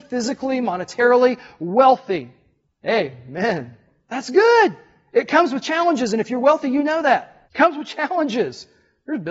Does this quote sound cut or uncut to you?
cut